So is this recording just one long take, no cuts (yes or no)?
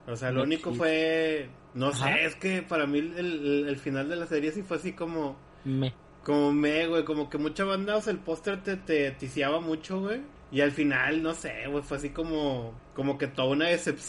yes